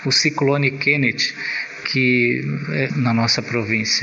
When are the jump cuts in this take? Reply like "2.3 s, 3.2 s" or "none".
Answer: 1.8 s, 2.9 s